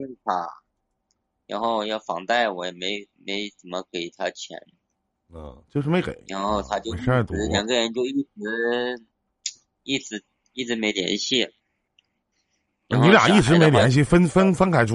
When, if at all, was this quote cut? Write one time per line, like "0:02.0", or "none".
none